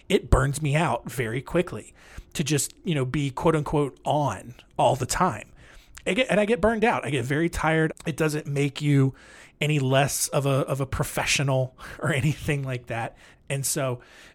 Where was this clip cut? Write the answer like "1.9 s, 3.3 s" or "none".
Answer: 7.9 s, 13.3 s